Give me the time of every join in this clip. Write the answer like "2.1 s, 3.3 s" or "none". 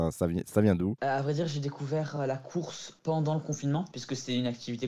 none